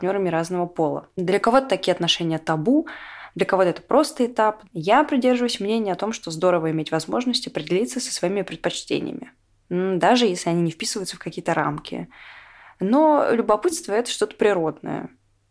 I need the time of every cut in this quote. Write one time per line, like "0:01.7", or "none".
none